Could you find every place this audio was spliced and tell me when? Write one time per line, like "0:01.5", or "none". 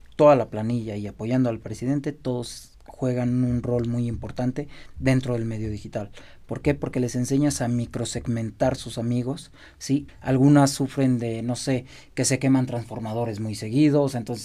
0:10.1